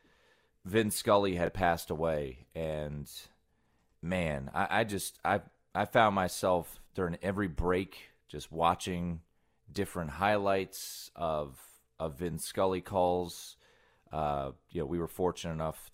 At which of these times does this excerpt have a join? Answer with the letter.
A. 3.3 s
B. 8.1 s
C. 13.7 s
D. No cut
D